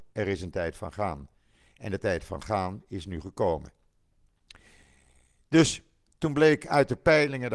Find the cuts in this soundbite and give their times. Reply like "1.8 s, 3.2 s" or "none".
none